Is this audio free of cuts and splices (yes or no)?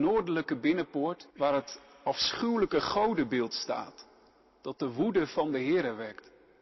no